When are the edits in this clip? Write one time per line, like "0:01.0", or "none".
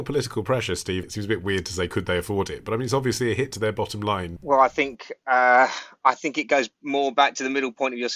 0:01.0
0:04.4